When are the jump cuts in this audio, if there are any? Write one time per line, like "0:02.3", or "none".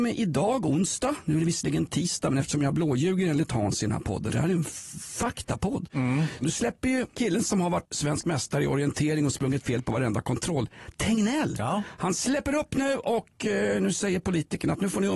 0:04.3
0:06.4